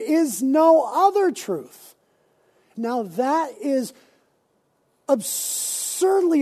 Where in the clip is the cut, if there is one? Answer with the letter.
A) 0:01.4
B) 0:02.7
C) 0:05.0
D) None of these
B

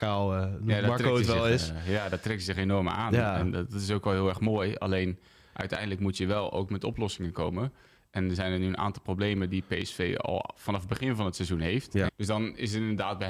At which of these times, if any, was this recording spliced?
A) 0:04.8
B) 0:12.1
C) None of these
B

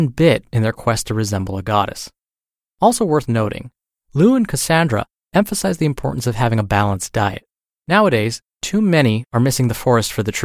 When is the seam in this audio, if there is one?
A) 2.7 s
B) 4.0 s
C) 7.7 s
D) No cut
C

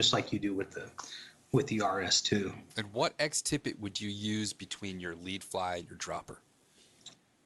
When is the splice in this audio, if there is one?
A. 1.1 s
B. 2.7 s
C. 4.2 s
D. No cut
B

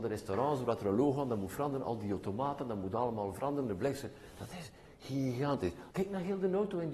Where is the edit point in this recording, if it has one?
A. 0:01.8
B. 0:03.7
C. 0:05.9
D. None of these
C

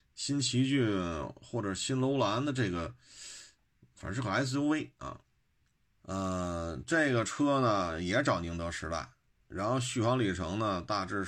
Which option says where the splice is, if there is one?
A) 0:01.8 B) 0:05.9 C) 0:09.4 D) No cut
B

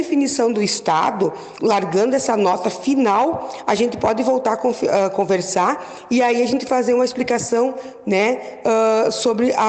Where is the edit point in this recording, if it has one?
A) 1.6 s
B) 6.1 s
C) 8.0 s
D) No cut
A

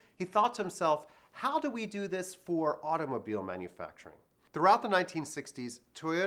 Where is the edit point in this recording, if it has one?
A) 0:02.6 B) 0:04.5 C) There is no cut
B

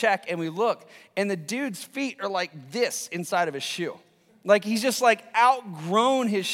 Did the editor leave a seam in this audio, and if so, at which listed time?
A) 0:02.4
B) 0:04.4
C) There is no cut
C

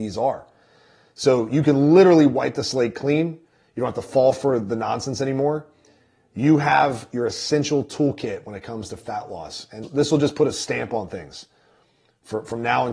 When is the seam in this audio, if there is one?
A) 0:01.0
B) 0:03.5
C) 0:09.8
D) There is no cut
C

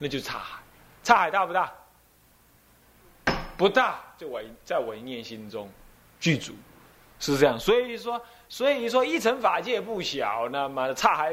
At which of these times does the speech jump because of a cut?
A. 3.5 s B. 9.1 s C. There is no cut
C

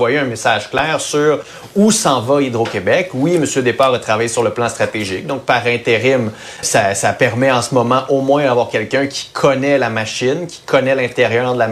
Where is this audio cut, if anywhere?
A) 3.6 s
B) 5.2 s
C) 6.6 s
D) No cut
C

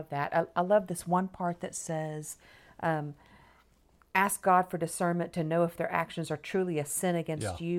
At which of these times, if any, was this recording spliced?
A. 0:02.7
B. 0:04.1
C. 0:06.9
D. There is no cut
B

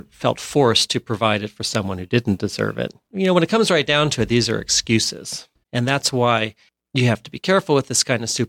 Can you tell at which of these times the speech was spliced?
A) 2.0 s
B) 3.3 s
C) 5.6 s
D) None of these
C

